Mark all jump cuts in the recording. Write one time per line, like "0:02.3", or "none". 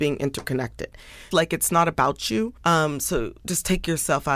0:01.3
0:02.6